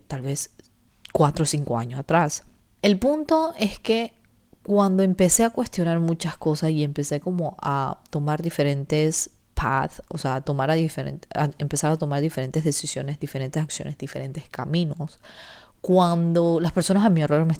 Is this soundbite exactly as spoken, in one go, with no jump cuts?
yes; 0 cuts

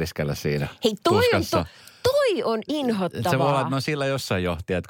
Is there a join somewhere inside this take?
no; 0 cuts

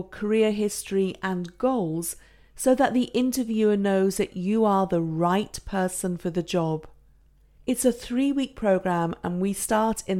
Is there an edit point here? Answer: no; 0 cuts

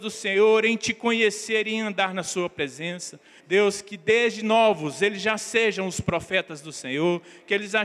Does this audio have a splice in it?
yes; 1 cut; at 3.4 s

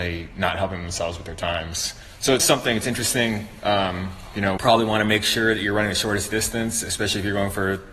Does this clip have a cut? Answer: yes; 2 cuts; at 2.4 s, 4.6 s

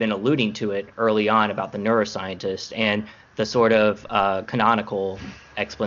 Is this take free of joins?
yes; 0 cuts

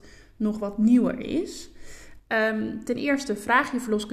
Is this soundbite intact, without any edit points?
no; 1 cut; at 2.2 s

